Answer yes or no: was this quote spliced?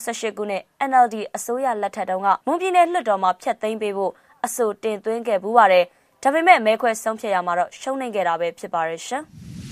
yes